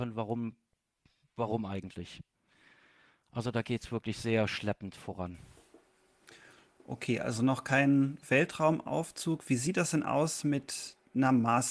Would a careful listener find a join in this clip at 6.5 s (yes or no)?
no